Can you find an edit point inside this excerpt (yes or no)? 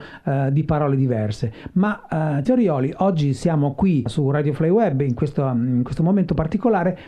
yes